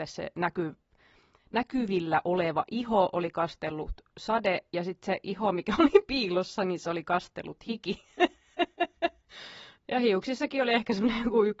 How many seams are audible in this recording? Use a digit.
0